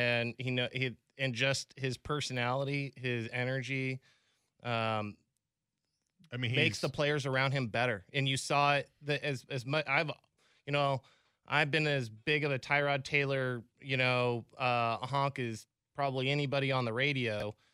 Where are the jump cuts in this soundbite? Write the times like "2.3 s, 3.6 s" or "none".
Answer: none